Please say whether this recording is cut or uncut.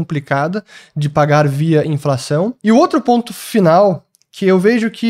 cut